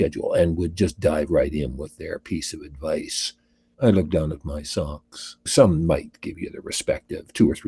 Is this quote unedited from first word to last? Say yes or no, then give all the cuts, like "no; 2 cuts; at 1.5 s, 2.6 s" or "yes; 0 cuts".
no; 2 cuts; at 3.7 s, 5.5 s